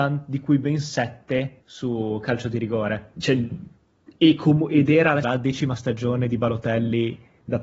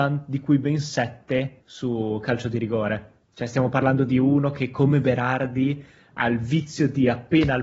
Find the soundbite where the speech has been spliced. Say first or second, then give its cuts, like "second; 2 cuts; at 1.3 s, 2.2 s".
first; 2 cuts; at 3.2 s, 5.2 s